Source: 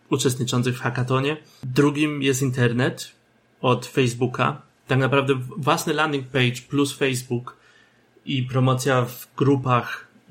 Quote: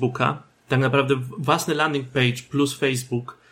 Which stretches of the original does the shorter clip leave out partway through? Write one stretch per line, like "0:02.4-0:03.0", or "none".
none